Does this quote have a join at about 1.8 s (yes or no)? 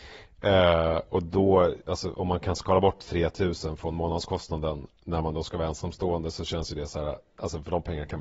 yes